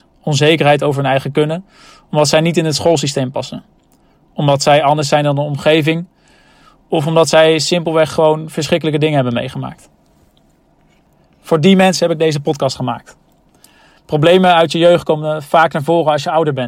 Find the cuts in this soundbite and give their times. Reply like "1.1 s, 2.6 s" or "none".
none